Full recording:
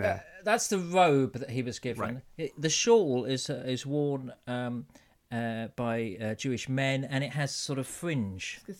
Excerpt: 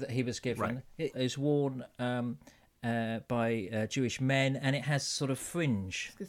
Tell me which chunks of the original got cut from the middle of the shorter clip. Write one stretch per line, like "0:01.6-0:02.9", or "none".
0:02.5-0:03.6